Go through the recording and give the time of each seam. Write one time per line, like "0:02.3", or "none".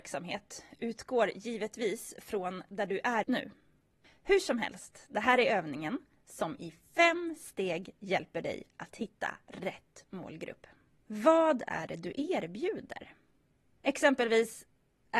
0:03.2
0:11.0
0:13.8